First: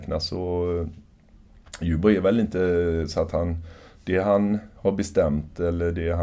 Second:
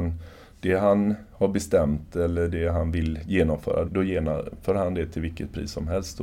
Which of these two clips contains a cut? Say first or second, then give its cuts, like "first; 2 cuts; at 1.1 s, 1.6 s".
second; 1 cut; at 3.9 s